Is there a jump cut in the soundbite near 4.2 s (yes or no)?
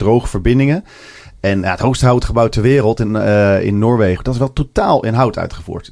yes